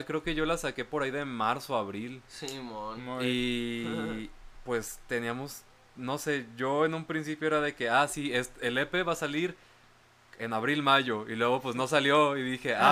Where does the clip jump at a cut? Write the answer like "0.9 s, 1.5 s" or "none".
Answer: none

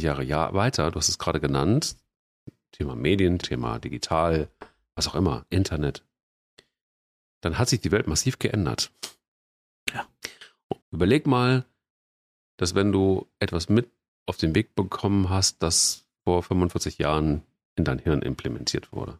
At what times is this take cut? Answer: 3.4 s, 10.8 s

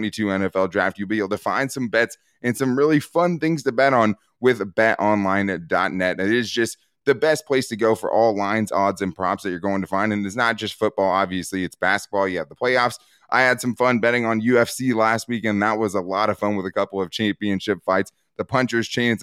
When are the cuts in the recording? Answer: none

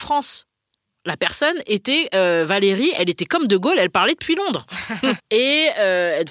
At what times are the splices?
5.2 s

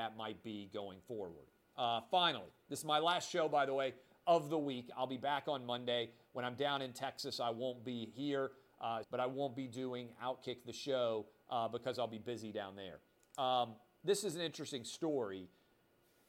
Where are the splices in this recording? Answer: 9.0 s

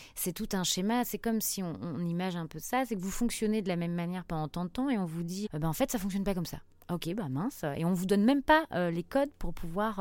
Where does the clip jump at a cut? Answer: 5.5 s

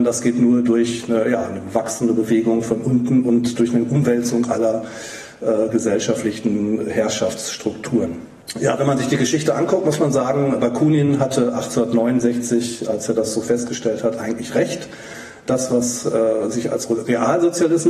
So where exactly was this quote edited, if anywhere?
none

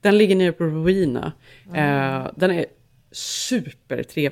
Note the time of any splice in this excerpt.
none

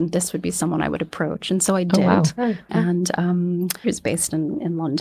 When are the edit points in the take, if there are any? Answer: 2.7 s, 3.8 s

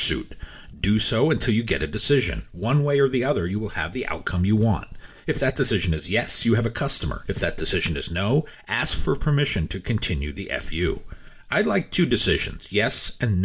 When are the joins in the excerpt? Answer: none

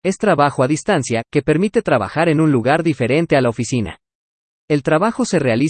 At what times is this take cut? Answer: none

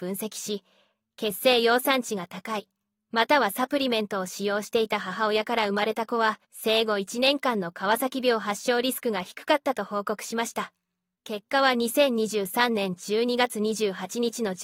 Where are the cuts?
6.4 s

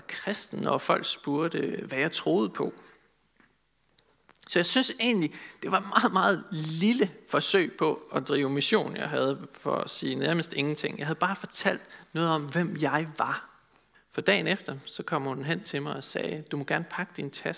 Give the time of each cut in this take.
13.9 s

